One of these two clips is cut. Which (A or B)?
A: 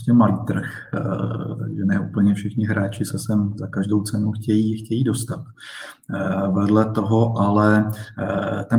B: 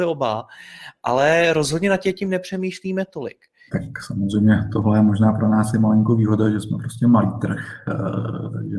B